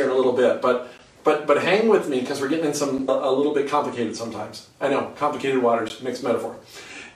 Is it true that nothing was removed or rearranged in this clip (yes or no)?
no